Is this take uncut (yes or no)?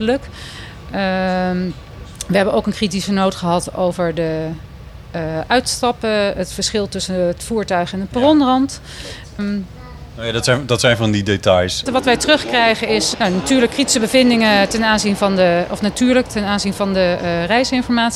no